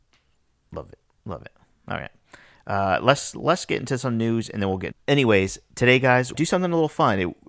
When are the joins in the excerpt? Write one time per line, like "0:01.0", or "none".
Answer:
0:04.9
0:06.3